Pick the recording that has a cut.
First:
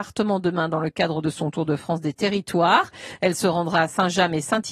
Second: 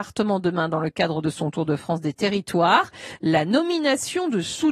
second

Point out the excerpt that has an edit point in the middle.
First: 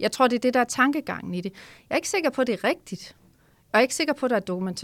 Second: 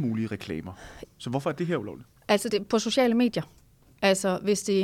second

